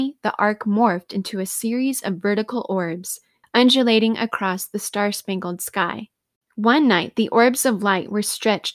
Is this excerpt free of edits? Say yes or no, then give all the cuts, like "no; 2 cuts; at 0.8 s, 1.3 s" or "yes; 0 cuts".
no; 1 cut; at 3.4 s